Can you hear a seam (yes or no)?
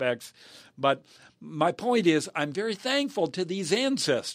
no